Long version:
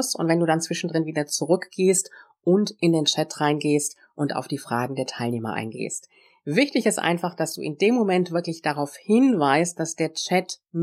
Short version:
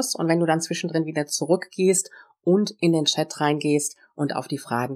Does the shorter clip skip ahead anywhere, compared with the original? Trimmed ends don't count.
no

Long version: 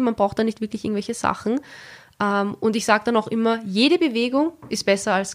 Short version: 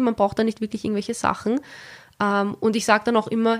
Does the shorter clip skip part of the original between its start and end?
no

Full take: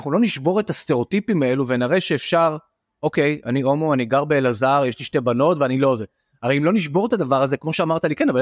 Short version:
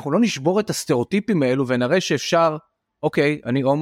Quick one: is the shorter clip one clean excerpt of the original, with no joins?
yes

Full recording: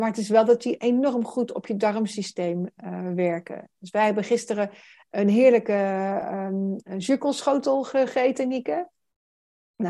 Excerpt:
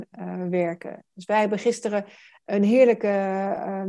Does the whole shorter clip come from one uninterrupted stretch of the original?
yes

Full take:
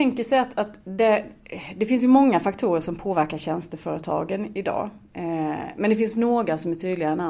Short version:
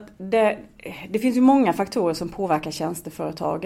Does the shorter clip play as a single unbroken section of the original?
yes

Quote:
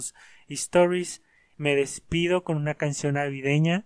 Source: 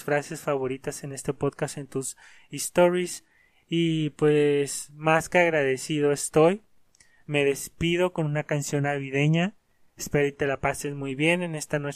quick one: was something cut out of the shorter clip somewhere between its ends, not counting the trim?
yes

